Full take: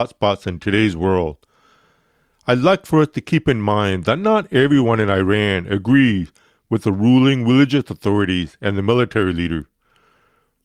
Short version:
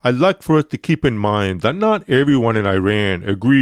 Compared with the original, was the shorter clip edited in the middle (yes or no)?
no